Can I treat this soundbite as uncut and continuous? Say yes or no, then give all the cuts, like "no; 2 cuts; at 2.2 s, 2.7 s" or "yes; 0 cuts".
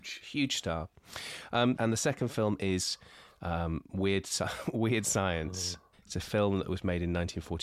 no; 2 cuts; at 1.8 s, 5.9 s